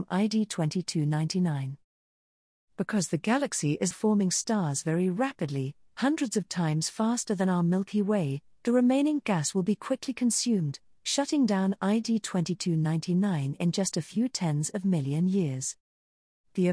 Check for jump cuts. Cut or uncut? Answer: cut